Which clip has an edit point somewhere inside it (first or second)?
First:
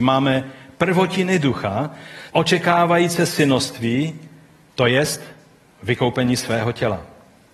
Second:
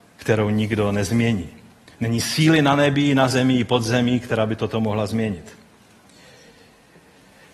first